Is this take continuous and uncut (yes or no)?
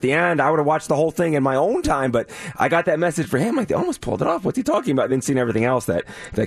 yes